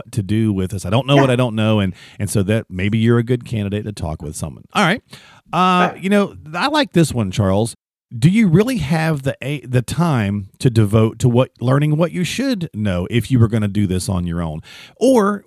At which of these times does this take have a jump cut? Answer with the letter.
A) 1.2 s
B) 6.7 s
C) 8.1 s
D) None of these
D